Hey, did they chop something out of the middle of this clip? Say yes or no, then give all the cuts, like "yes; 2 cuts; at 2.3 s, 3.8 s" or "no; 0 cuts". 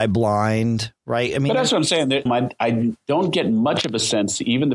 yes; 1 cut; at 2.3 s